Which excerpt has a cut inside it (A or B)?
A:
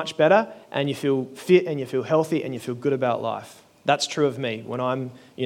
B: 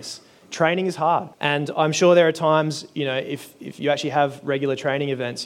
B